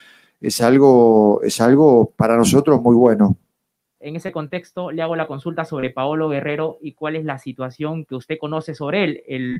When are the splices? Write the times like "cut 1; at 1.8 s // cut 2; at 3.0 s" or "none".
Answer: cut 1; at 4.0 s // cut 2; at 8.1 s